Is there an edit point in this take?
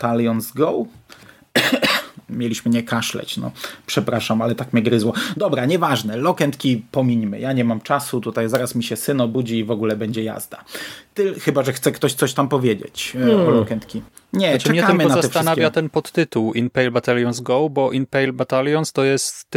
no; 0 cuts

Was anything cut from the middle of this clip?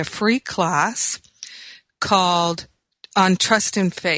no; 0 cuts

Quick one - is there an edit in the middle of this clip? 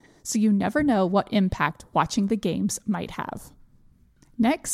no; 0 cuts

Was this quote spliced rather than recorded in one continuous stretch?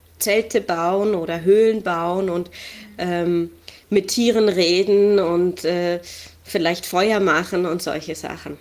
no; 0 cuts

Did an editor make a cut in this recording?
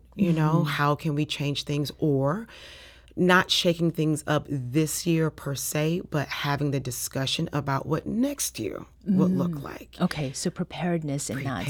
no; 0 cuts

